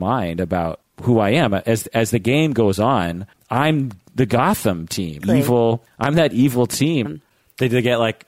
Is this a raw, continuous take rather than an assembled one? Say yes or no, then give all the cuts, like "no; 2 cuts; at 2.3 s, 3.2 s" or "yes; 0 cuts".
no; 2 cuts; at 5.2 s, 7.0 s